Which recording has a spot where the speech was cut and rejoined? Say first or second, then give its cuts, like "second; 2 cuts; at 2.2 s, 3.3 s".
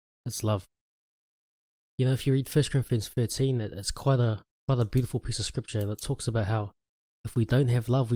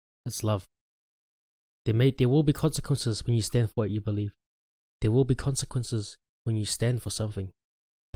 second; 1 cut; at 1.8 s